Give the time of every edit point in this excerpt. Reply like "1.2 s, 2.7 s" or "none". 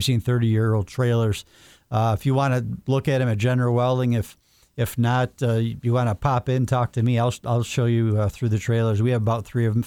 none